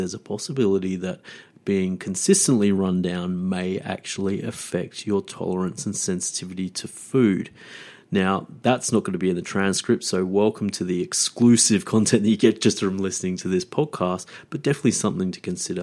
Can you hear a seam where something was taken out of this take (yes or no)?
no